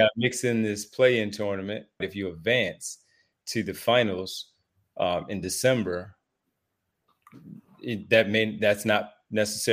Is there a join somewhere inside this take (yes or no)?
yes